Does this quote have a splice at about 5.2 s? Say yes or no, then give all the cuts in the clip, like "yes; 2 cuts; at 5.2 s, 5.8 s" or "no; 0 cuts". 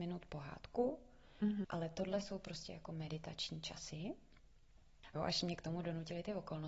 yes; 2 cuts; at 1.6 s, 5.2 s